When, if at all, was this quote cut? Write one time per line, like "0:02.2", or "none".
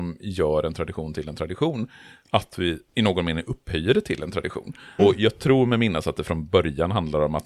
0:02.9
0:05.0